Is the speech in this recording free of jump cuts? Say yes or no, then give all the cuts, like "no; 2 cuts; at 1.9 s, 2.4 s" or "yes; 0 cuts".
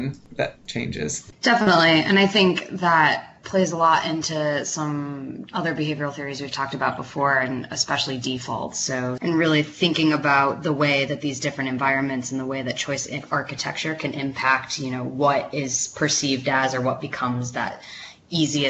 no; 1 cut; at 9.2 s